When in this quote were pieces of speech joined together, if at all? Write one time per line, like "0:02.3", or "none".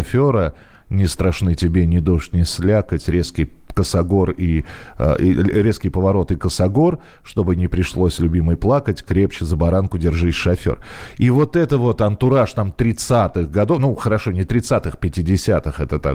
none